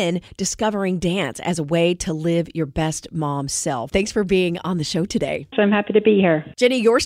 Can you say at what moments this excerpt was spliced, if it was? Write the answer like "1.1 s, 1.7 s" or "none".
3.9 s, 5.5 s